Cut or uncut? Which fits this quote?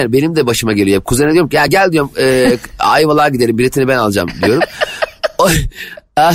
uncut